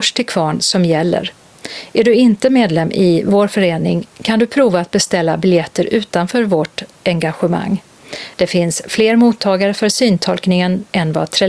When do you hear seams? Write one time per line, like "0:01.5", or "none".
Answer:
0:08.3